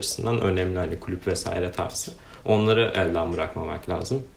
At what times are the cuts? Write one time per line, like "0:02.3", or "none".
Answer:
none